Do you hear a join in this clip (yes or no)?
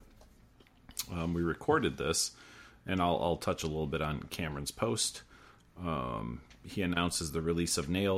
no